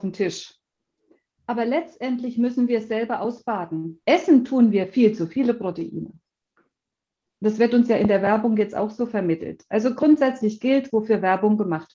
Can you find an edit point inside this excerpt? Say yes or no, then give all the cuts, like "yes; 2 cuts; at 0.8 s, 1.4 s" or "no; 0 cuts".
yes; 3 cuts; at 1.4 s, 4.0 s, 10.9 s